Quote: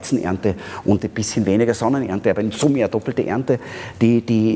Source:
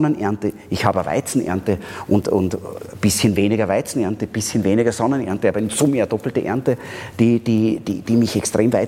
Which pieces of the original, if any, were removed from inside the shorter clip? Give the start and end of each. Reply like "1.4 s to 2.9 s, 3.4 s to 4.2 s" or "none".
2.2 s to 4.2 s